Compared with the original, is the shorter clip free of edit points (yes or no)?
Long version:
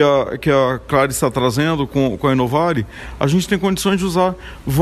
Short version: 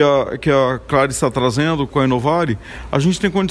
no